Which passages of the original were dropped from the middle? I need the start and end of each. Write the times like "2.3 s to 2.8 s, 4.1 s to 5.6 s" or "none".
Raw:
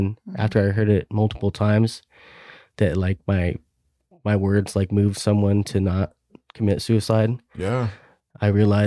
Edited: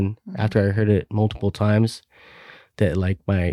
none